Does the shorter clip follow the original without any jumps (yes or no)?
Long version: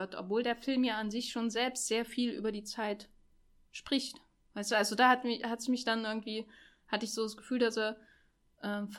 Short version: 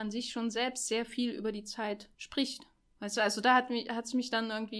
no